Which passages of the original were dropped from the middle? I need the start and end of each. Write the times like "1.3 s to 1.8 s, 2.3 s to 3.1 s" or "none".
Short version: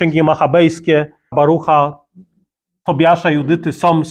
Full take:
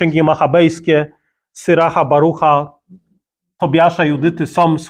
1.3 s to 2.1 s